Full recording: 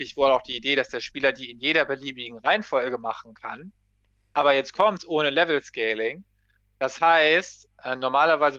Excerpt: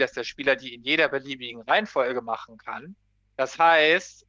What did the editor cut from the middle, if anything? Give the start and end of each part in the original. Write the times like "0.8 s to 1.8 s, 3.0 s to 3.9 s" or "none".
4.0 s to 6.6 s